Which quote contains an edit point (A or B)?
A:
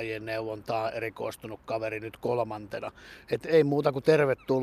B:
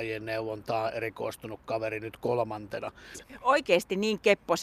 B